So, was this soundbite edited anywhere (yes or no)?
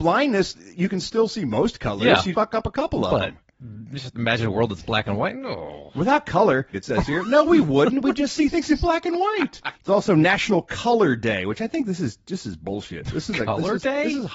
yes